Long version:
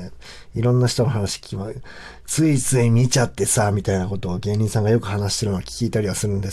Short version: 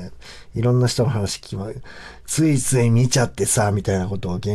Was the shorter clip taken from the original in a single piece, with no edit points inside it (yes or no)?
yes